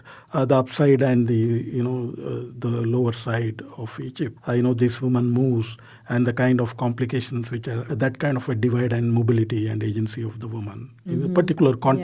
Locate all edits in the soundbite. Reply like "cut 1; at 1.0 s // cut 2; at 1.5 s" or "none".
cut 1; at 4.4 s // cut 2; at 7.9 s